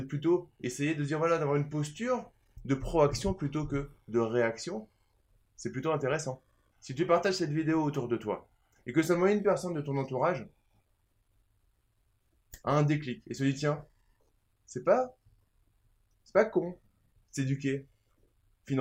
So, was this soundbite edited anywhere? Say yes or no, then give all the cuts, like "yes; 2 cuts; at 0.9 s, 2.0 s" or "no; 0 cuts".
yes; 1 cut; at 6.7 s